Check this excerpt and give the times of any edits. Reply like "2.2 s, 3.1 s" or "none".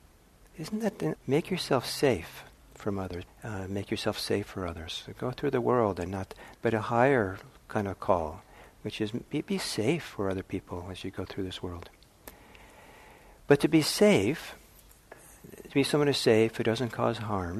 1.1 s, 3.3 s, 6.5 s